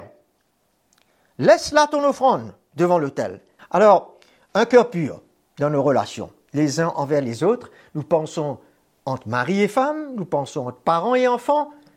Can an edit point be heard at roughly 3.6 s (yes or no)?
yes